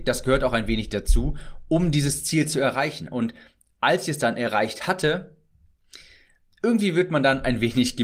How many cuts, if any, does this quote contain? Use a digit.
0